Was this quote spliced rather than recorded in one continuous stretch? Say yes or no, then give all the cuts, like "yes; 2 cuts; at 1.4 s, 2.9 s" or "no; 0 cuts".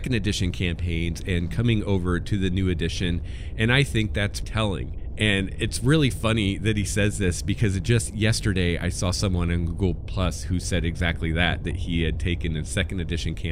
yes; 1 cut; at 4.4 s